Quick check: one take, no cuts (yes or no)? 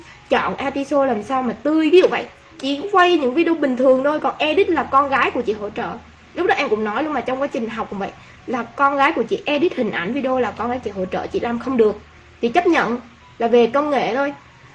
yes